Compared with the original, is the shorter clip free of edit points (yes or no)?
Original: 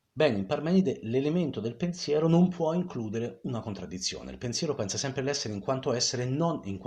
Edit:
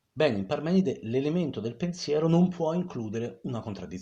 yes